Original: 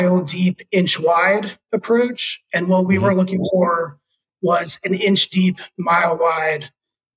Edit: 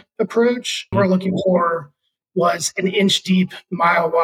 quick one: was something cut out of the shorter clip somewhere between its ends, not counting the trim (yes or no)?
yes